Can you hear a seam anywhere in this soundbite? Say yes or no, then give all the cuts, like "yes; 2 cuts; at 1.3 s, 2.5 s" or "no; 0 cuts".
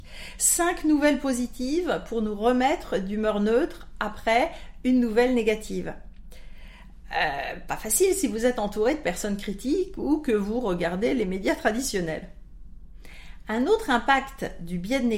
no; 0 cuts